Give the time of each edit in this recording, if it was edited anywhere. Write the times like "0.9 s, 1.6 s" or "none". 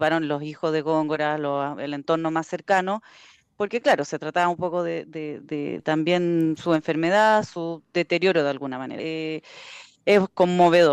5.8 s, 9.0 s